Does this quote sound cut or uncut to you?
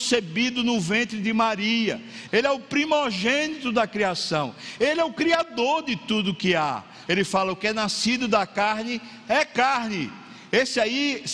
cut